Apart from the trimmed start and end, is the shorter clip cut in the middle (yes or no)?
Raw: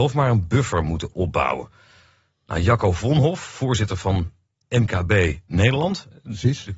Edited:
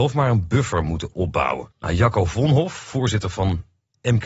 yes